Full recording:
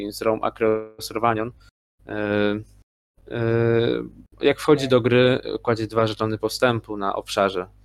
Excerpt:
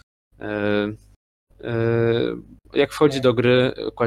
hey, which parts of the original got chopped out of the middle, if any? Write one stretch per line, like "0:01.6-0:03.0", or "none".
none